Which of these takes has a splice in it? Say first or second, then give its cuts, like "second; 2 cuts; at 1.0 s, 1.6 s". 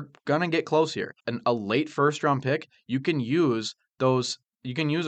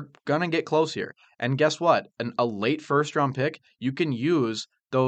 first; 1 cut; at 1.2 s